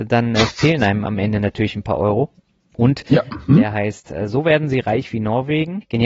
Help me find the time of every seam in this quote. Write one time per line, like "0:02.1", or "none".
0:03.5